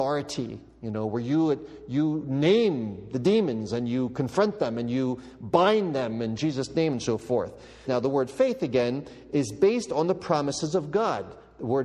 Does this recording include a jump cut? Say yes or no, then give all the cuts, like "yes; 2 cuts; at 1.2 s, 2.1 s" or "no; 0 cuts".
yes; 1 cut; at 7.8 s